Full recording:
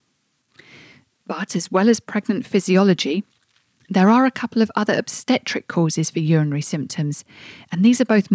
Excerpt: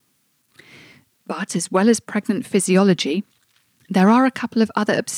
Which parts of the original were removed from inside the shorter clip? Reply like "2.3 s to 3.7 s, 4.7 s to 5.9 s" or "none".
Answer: none